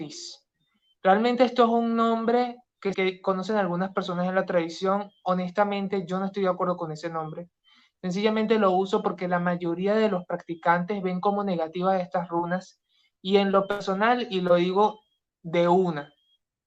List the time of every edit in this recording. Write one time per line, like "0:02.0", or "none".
0:02.9